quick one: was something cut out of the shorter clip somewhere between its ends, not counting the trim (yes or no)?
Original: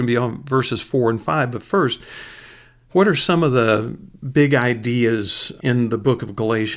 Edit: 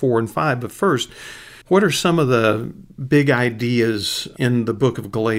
yes